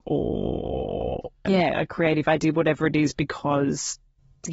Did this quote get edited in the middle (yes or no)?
yes